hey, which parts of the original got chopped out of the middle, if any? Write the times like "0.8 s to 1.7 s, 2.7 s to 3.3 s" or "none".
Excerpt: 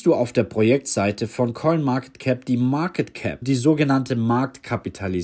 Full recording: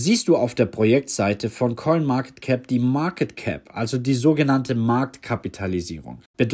3.6 s to 4.0 s